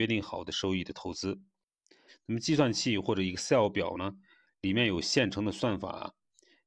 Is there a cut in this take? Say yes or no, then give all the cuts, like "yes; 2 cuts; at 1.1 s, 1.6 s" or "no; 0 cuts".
yes; 1 cut; at 2.1 s